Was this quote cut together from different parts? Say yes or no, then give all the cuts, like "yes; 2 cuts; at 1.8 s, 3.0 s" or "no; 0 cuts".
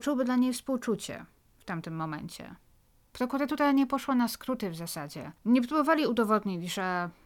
yes; 2 cuts; at 3.1 s, 5.4 s